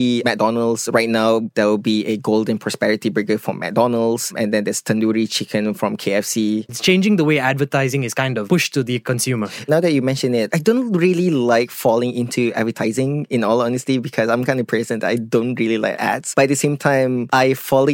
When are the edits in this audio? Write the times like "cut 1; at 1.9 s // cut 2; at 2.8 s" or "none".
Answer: cut 1; at 6.7 s

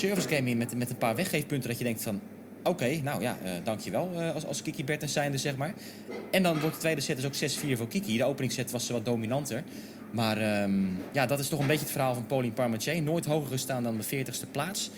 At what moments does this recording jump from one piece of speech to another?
none

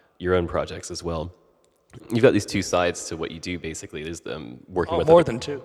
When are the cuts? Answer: cut 1; at 2.0 s

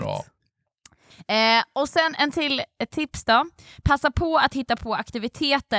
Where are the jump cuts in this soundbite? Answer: none

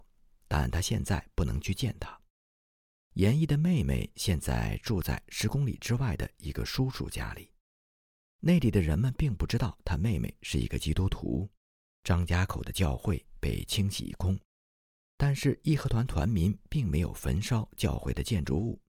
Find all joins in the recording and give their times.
cut 1; at 11.9 s

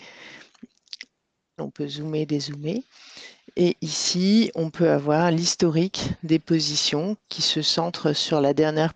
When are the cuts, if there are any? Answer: cut 1; at 1.6 s

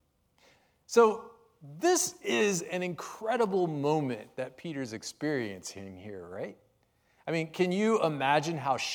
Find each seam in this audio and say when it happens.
none

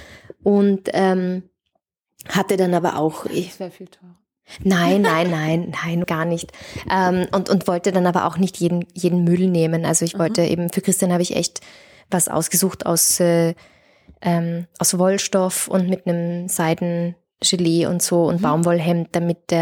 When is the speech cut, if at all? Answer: cut 1; at 6.0 s

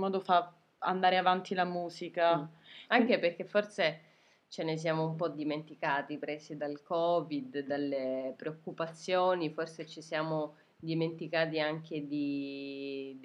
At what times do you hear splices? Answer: none

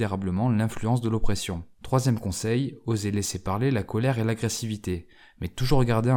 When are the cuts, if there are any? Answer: cut 1; at 1.7 s

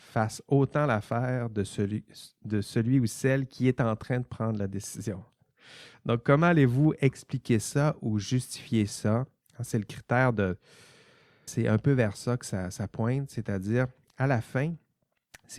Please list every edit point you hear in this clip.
cut 1; at 11.5 s

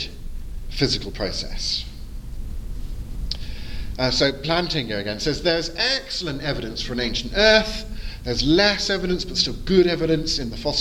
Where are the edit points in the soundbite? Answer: cut 1; at 4.0 s

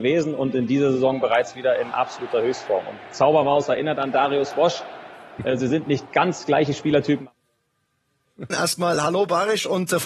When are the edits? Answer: cut 1; at 8.5 s

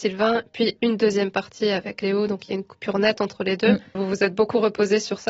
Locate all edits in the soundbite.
cut 1; at 3.9 s

